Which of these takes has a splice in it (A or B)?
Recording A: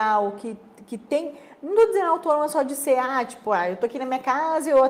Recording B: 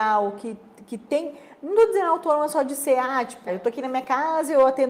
B